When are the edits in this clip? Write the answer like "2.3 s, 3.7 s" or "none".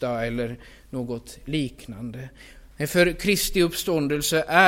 2.7 s